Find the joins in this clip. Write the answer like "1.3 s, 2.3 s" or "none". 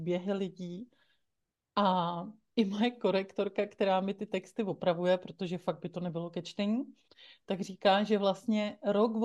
none